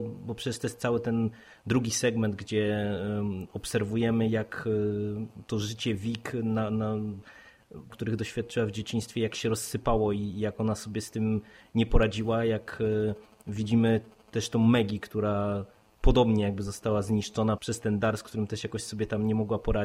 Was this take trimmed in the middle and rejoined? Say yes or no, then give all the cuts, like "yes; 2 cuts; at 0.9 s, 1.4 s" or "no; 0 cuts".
yes; 2 cuts; at 7.9 s, 17.6 s